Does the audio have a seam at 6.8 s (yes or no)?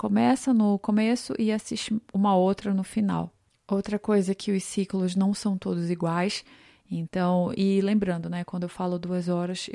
yes